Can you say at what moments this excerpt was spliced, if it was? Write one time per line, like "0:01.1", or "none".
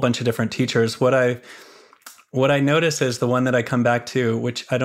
none